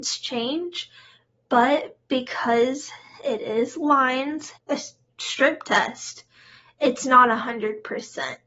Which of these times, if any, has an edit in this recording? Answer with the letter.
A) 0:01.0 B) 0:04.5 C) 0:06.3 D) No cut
B